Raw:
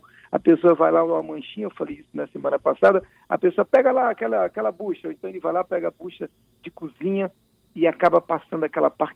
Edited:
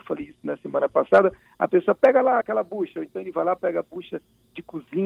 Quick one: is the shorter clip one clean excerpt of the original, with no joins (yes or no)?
no